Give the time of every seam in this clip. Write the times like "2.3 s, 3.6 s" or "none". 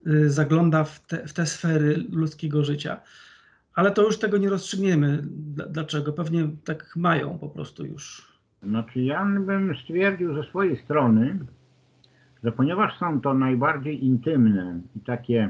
none